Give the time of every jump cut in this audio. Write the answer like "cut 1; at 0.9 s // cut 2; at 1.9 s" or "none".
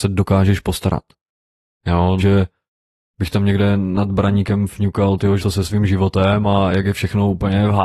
cut 1; at 2.2 s // cut 2; at 5.4 s